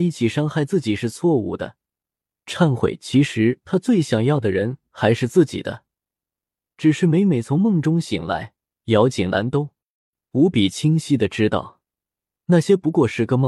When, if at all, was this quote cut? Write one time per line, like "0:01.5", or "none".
none